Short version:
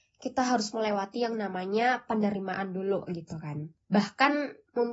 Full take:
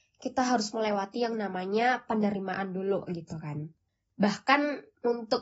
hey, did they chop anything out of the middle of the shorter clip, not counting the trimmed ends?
yes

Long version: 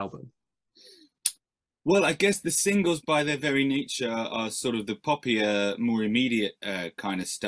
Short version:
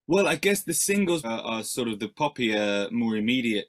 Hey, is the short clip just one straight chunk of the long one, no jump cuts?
no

